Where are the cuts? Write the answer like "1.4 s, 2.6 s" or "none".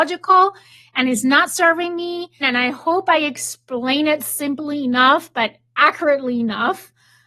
2.4 s